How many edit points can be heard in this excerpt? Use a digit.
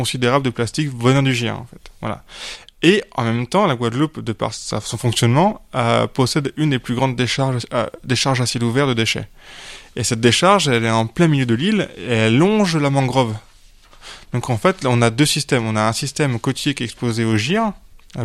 1